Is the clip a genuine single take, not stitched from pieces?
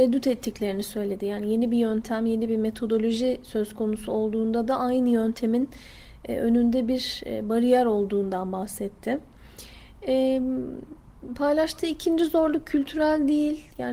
yes; 0 cuts

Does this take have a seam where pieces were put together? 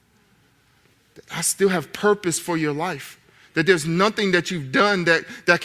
no; 0 cuts

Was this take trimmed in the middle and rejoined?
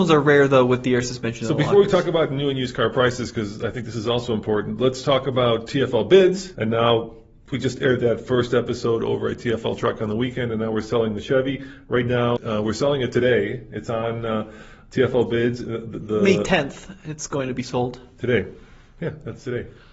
yes; 2 cuts; at 6.5 s, 12.4 s

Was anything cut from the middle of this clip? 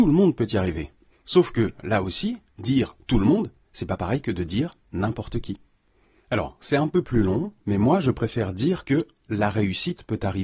yes; 1 cut; at 1.1 s

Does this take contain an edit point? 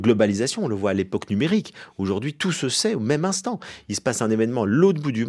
no; 0 cuts

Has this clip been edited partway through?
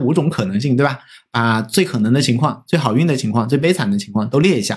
no; 0 cuts

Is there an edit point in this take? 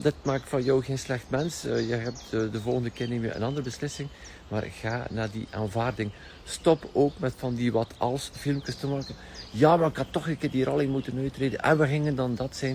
no; 0 cuts

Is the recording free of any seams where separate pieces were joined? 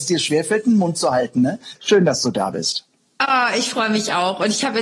no; 1 cut; at 1.8 s

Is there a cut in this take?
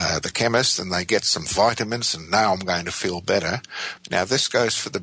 yes; 1 cut; at 4.0 s

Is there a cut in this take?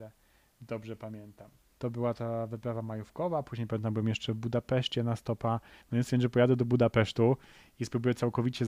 yes; 1 cut; at 5.8 s

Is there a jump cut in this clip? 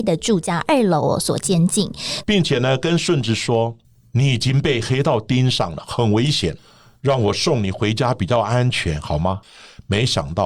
yes; 1 cut; at 2.2 s

